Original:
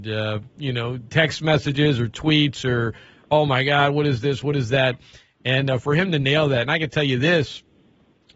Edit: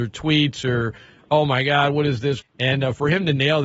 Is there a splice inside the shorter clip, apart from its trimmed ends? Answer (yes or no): yes